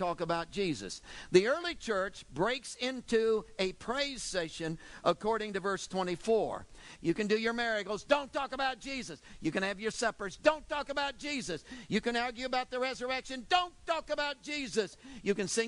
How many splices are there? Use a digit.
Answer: 1